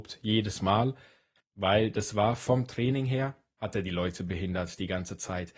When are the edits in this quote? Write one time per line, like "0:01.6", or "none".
0:01.4